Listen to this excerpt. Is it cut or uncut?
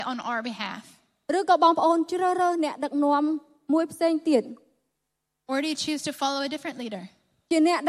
uncut